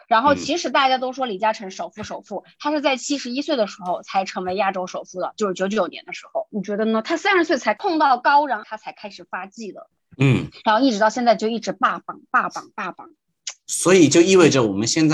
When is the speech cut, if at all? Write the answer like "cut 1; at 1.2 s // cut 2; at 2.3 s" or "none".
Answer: cut 1; at 6.5 s // cut 2; at 10.1 s